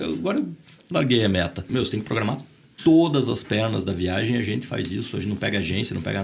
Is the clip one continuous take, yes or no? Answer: no